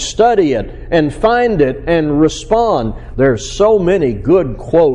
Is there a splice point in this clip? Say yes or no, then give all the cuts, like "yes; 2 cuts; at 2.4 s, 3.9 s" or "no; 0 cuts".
yes; 1 cut; at 3.1 s